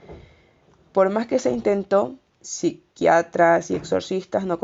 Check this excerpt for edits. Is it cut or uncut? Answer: cut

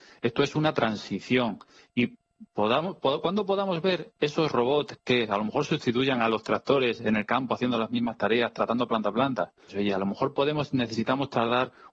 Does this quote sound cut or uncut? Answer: cut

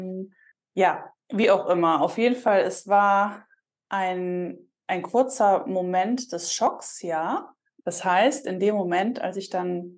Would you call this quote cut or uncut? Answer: cut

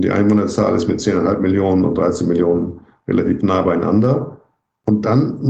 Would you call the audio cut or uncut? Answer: uncut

